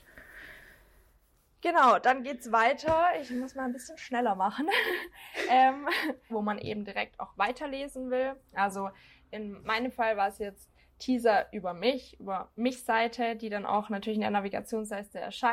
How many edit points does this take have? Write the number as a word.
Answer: two